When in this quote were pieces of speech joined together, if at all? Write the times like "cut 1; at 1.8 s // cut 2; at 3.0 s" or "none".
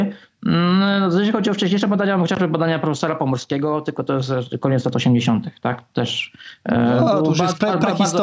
none